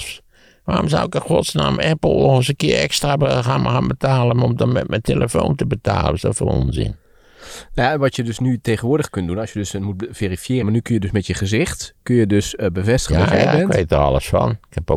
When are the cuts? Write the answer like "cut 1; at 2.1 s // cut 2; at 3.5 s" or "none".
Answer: cut 1; at 10.6 s